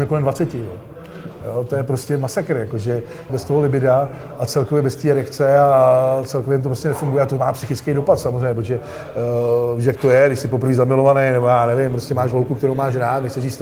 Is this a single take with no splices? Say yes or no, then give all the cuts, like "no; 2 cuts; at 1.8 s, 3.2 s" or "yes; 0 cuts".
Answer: no; 1 cut; at 3.3 s